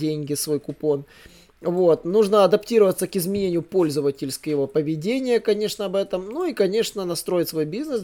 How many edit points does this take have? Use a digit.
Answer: 0